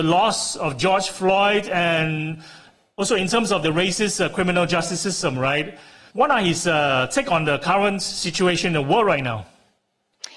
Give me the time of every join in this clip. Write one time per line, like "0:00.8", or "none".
0:06.1